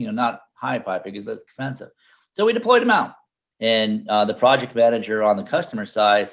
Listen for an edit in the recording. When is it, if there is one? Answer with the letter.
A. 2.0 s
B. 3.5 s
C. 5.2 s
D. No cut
B